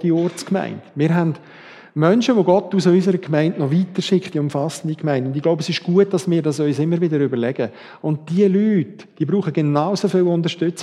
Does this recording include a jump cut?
yes; 1 cut; at 4.3 s

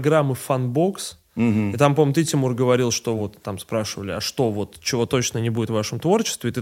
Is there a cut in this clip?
no; 0 cuts

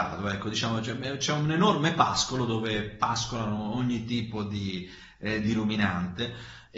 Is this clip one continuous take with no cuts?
yes; 0 cuts

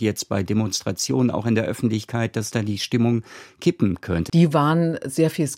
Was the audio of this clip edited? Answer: yes; 1 cut; at 4.3 s

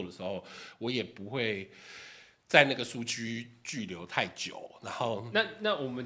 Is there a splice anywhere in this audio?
no; 0 cuts

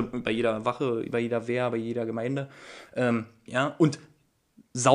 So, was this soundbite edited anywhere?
yes; 1 cut; at 3.5 s

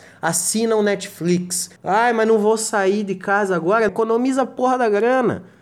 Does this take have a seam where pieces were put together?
yes; 2 cuts; at 1.8 s, 3.9 s

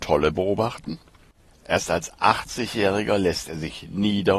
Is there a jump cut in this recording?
yes; 1 cut; at 1.5 s

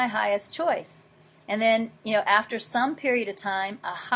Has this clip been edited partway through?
no; 0 cuts

